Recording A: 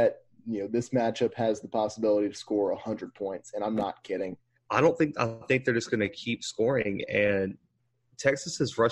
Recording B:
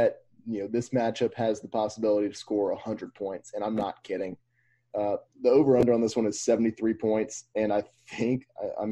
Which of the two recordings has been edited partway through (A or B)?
A